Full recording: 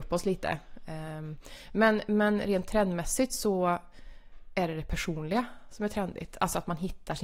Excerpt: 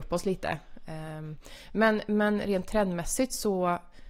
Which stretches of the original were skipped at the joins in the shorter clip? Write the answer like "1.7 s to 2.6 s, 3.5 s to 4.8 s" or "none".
none